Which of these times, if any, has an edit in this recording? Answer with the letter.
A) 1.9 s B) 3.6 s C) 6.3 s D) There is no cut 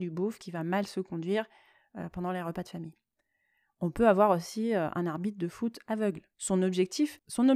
C